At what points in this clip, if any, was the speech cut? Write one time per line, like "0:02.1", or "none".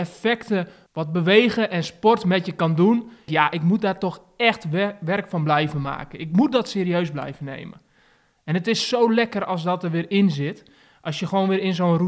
0:03.3